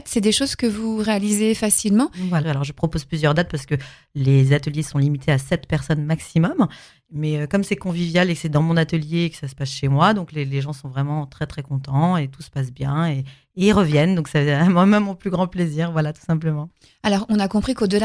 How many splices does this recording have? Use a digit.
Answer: 1